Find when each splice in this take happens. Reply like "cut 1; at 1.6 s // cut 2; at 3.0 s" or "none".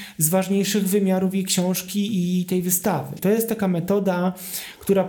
cut 1; at 3.2 s